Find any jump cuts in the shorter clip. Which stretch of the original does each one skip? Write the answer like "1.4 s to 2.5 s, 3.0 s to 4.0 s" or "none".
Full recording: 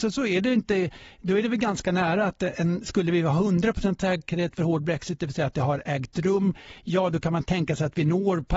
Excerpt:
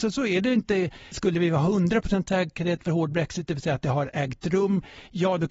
1.1 s to 2.8 s